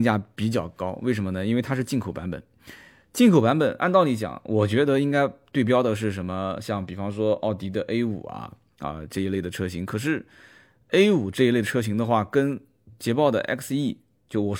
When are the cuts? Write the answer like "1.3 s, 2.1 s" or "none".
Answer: none